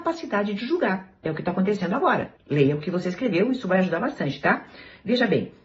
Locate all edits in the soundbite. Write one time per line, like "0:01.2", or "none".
0:02.4